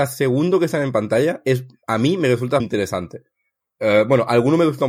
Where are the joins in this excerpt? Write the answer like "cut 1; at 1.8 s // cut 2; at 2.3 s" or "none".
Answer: cut 1; at 2.6 s